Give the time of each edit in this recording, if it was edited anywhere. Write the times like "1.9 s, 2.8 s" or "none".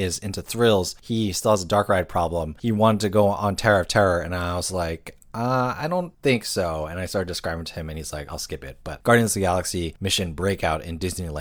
8.3 s